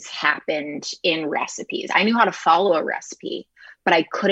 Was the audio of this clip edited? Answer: no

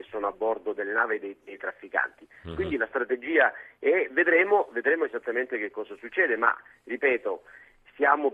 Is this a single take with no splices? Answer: yes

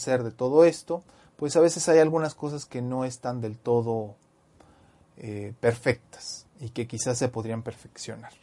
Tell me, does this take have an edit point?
no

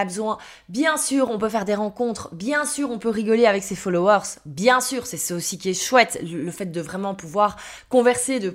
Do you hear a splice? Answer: no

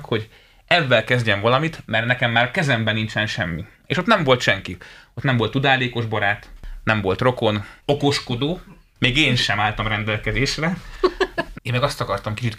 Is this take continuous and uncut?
no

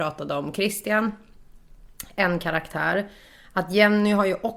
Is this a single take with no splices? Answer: yes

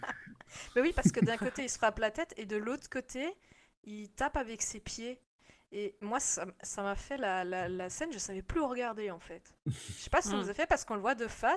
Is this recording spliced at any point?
no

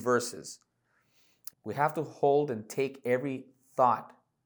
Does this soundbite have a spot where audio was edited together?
yes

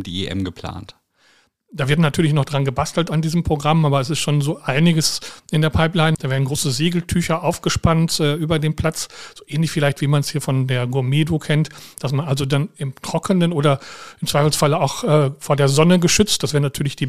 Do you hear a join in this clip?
yes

